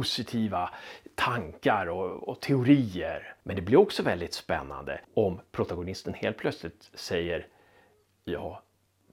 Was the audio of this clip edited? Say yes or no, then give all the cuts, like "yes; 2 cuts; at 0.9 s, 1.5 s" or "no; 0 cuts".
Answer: yes; 2 cuts; at 3.4 s, 5.0 s